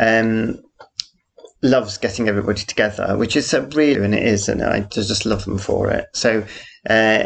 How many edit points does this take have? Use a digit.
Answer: 1